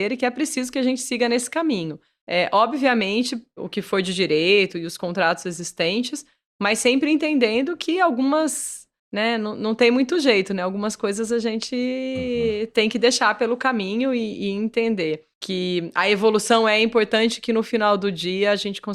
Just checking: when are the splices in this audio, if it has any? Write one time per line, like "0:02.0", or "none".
0:03.6